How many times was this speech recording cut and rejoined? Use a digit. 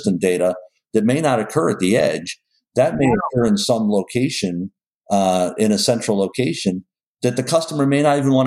0